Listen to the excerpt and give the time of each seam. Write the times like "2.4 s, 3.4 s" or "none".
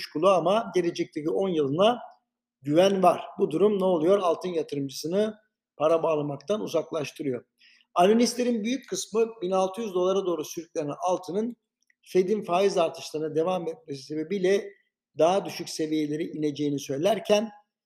none